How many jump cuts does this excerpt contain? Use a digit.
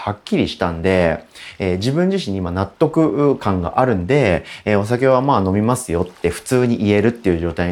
0